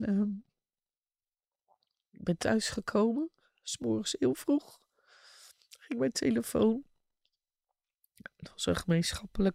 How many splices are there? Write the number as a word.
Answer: zero